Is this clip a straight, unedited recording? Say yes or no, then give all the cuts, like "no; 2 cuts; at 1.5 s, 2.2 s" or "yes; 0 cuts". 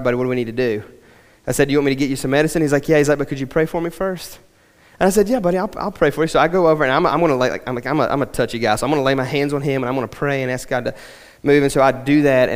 yes; 0 cuts